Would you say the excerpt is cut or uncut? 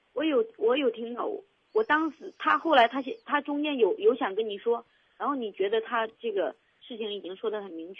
uncut